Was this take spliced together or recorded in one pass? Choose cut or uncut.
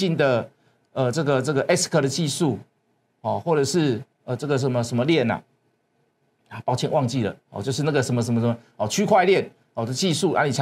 uncut